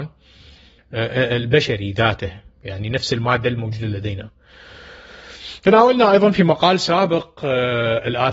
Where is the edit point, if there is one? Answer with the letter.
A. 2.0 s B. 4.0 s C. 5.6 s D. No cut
D